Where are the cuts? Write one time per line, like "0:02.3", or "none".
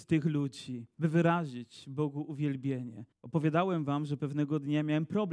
0:00.9
0:03.1